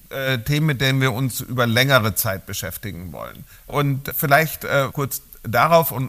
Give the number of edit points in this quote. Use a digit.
2